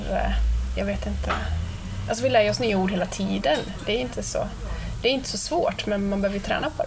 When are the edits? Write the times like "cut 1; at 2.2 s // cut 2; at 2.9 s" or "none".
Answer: none